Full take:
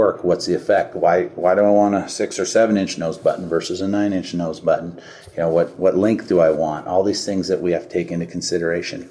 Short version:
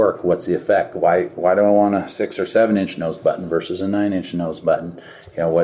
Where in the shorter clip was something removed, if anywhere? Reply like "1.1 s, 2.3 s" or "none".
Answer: none